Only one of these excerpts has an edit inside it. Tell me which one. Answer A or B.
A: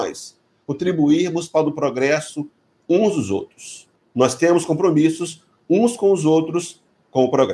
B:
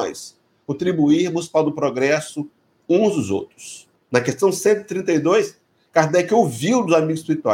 B